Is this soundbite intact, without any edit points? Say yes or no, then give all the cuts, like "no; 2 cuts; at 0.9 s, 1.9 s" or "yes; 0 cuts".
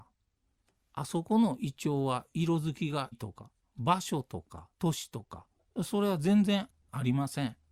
no; 2 cuts; at 3.1 s, 4.7 s